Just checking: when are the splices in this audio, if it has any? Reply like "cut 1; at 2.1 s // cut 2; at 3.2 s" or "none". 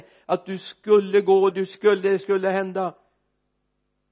cut 1; at 1.5 s